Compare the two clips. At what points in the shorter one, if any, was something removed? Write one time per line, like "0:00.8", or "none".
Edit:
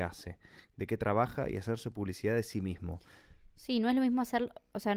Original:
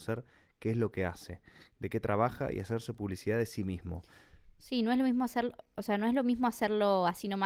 none